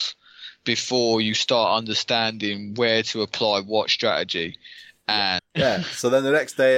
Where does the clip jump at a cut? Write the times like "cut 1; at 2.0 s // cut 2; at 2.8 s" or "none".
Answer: cut 1; at 5.4 s